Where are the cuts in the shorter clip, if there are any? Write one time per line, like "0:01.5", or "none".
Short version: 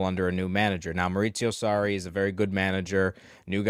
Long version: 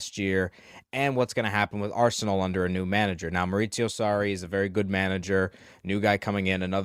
none